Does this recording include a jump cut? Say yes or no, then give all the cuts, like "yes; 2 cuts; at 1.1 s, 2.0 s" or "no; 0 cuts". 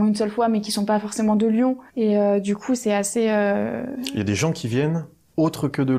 yes; 1 cut; at 1.9 s